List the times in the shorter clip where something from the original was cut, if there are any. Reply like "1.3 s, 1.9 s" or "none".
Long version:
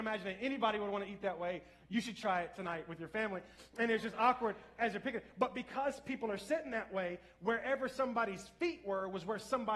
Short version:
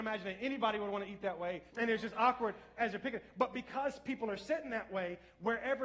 1.7 s

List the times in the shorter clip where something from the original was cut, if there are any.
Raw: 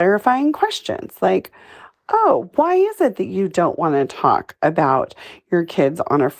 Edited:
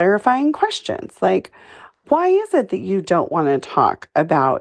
2.0 s

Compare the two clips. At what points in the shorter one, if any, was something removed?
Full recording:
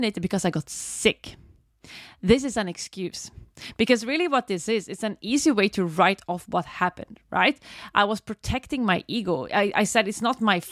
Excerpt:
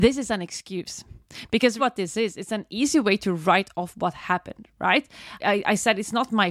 1.8 s, 5.4 s

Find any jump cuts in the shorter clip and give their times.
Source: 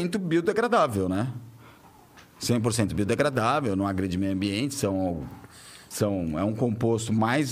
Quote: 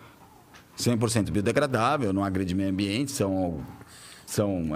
none

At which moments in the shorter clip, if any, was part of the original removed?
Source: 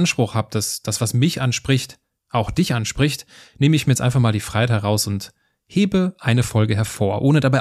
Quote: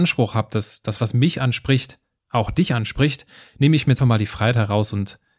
4.0 s

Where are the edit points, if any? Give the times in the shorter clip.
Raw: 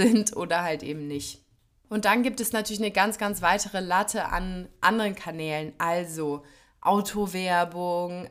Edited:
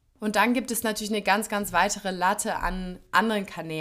none

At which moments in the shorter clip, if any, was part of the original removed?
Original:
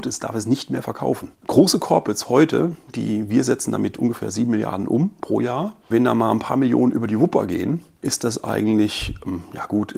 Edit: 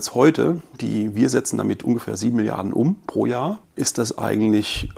3.6 s

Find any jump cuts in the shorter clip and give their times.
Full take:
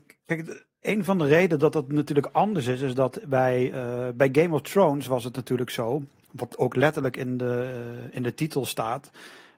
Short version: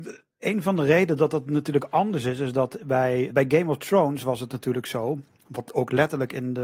3.3 s

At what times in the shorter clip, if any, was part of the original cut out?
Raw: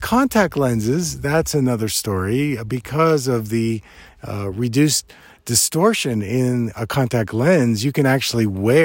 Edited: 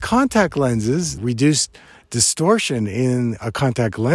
1.2 s

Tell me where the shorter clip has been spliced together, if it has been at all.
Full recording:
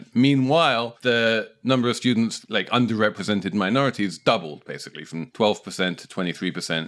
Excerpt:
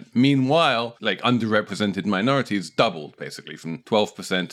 1.0 s

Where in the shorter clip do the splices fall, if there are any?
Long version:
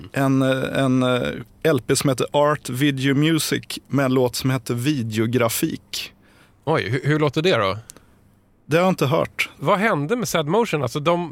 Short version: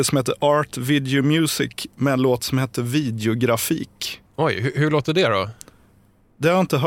4.3 s

